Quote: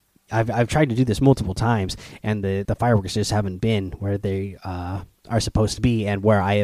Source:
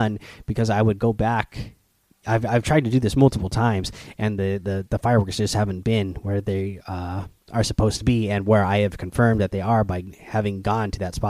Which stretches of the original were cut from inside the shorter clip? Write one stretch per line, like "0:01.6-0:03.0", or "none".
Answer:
0:04.6-0:04.9